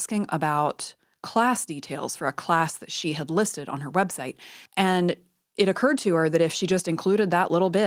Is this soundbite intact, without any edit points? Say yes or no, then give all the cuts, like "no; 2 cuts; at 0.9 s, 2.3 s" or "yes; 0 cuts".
no; 1 cut; at 4.7 s